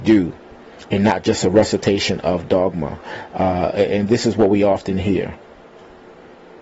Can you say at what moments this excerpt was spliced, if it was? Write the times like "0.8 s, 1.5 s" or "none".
none